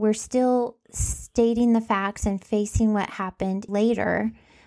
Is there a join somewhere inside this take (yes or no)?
yes